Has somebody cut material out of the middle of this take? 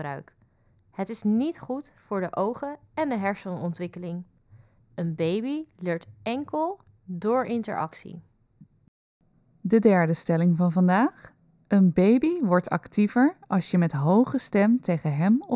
no; 0 cuts

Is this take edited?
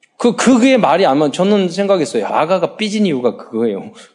yes; 1 cut; at 2.3 s

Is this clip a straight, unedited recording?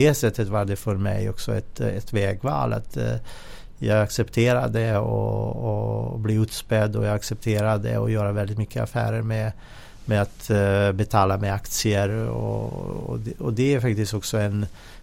yes; 0 cuts

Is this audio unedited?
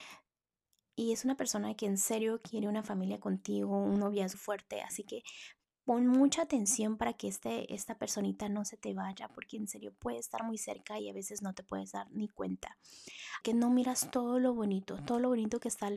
no; 2 cuts; at 4.3 s, 13.4 s

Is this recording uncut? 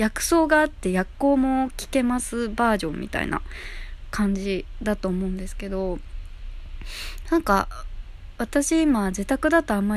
yes; 0 cuts

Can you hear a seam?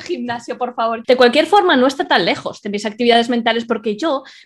yes; 1 cut; at 1.0 s

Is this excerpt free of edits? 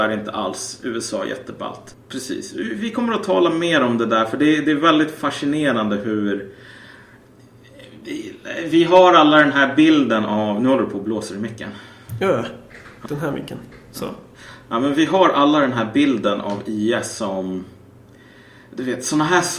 no; 2 cuts; at 1.9 s, 13.1 s

